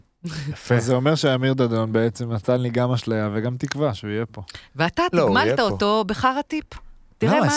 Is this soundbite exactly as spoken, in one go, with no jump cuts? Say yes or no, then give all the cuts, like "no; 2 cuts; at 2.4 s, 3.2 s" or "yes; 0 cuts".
yes; 0 cuts